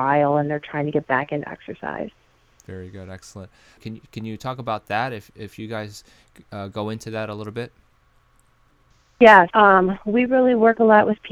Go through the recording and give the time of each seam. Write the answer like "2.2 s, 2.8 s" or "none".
3.8 s, 9.5 s